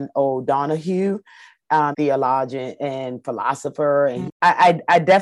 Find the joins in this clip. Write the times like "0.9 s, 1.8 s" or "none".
1.9 s, 4.3 s